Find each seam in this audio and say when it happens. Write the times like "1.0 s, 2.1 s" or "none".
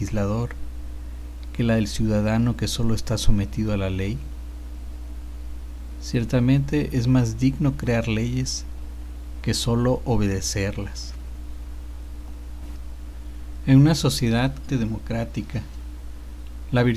14.7 s